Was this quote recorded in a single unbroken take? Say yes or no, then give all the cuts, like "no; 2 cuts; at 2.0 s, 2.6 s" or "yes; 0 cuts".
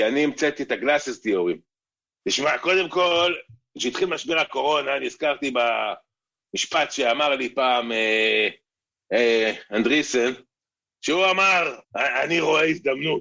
no; 2 cuts; at 2.2 s, 11.8 s